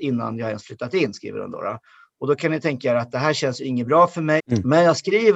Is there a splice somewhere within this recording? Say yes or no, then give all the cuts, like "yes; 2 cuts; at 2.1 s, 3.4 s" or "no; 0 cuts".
yes; 1 cut; at 4.4 s